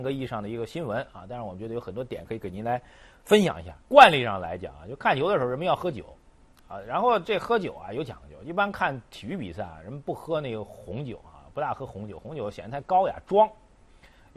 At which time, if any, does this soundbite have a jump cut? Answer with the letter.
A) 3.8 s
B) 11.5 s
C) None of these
A